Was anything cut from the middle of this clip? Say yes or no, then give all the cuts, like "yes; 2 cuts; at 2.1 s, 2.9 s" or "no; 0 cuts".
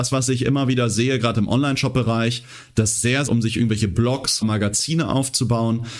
yes; 2 cuts; at 3.3 s, 4.4 s